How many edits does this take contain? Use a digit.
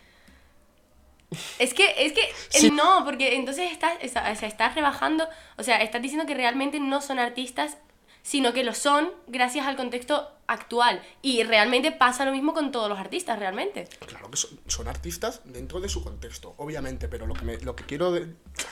1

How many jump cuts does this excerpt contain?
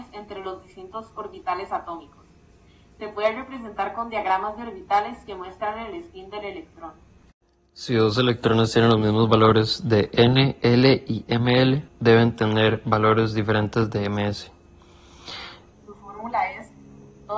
2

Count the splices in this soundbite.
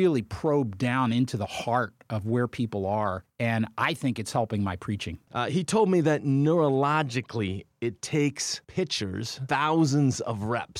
1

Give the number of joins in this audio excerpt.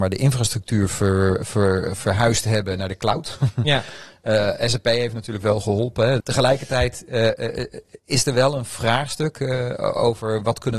1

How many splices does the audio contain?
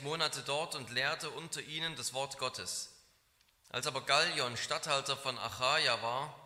0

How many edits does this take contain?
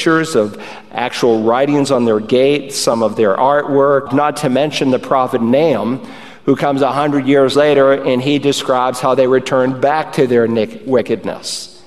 1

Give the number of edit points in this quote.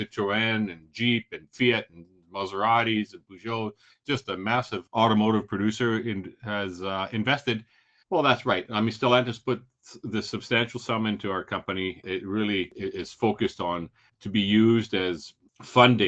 1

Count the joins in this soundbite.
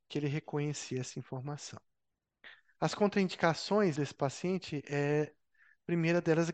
1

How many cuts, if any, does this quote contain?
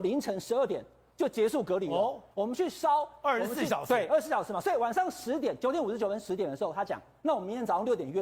1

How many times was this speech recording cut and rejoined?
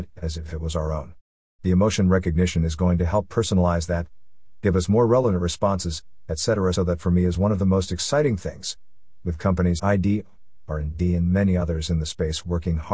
2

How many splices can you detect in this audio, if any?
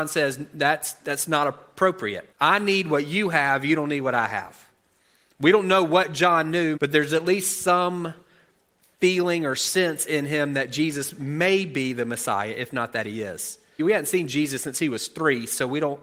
3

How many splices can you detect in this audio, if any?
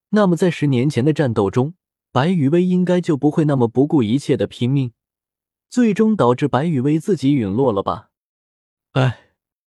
0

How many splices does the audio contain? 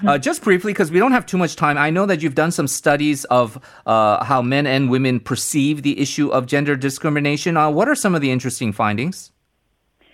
0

